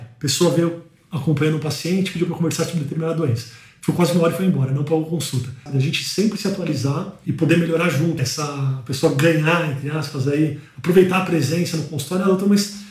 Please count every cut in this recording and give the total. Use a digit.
2